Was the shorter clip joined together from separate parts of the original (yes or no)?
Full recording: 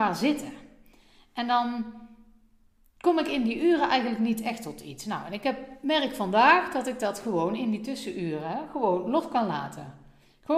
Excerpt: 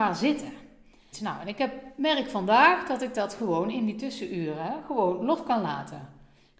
yes